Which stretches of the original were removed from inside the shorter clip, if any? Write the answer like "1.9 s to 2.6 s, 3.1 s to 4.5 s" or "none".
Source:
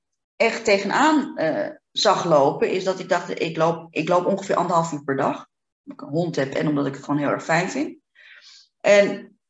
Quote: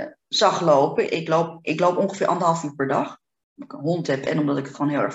2.7 s to 3.4 s